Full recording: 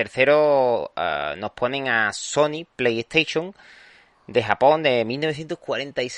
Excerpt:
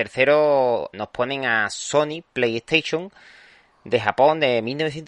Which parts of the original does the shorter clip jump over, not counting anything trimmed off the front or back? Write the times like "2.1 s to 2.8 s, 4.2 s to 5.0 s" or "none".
0.9 s to 1.4 s